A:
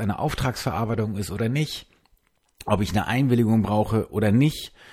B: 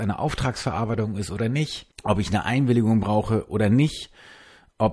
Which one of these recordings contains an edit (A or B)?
B